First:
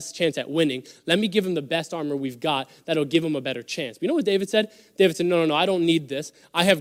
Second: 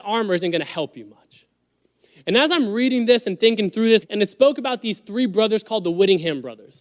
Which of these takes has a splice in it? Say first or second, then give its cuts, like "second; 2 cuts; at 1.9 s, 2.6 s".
second; 1 cut; at 4.0 s